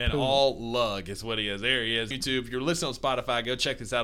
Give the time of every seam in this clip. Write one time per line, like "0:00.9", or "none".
0:02.1